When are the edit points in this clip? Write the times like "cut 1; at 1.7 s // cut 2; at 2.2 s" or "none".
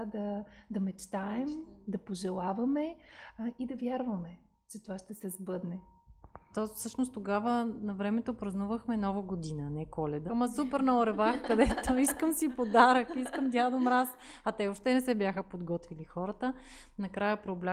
cut 1; at 6.5 s // cut 2; at 10.3 s

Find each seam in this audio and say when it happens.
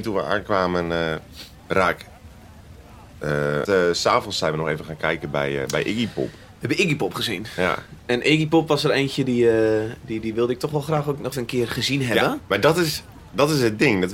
cut 1; at 3.7 s // cut 2; at 11.3 s

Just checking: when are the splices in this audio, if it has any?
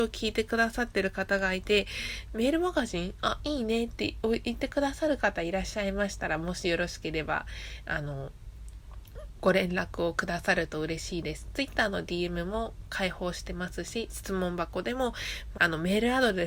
cut 1; at 15.5 s

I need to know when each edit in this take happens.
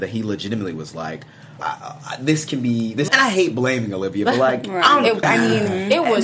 cut 1; at 1.6 s // cut 2; at 3.1 s // cut 3; at 5.2 s

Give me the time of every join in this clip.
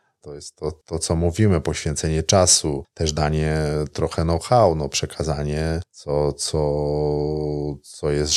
none

